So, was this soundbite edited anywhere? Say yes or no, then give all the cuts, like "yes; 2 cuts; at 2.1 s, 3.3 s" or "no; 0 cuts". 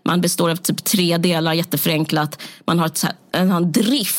yes; 1 cut; at 3.3 s